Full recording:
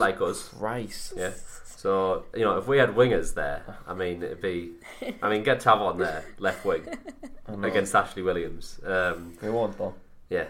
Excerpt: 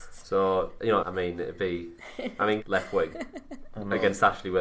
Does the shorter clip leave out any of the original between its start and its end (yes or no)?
yes